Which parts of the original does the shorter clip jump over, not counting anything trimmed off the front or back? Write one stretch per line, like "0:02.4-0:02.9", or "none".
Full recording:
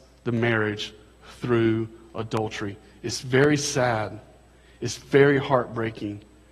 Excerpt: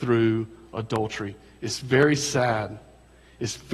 none